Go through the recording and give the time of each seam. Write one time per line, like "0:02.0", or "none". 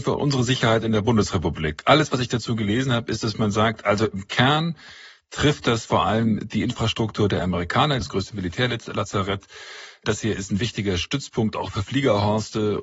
0:08.0

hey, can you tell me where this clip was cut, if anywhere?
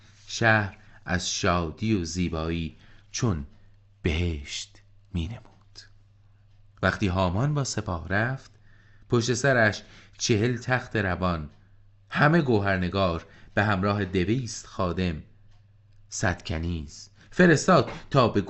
none

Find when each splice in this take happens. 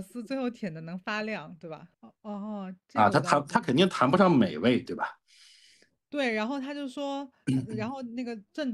0:01.9
0:04.8

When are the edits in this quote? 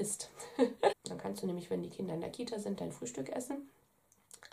0:00.9

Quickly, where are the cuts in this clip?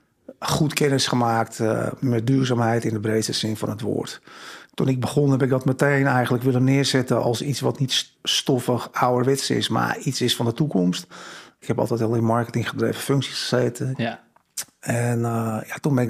0:08.1
0:11.6
0:13.9

